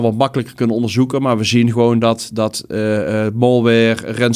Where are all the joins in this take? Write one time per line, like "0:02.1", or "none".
none